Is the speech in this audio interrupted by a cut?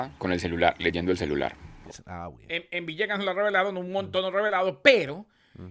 yes; 1 cut; at 1.9 s

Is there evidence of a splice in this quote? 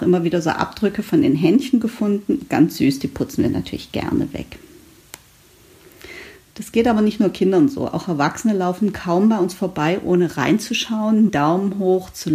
yes; 1 cut; at 11.3 s

